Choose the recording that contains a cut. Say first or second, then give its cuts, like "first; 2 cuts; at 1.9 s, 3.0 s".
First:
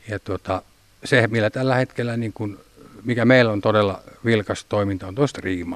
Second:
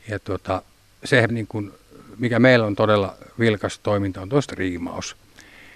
second; 1 cut; at 1.3 s